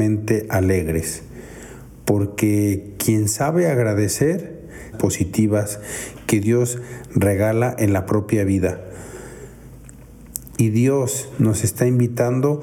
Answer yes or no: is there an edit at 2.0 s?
no